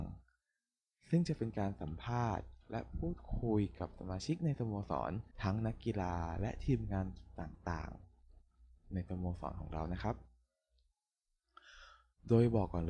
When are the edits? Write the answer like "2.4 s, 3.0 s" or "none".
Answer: 5.3 s